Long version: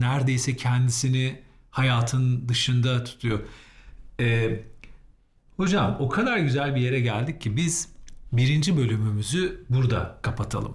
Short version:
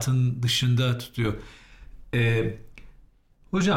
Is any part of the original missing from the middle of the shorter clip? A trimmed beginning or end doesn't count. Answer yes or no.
no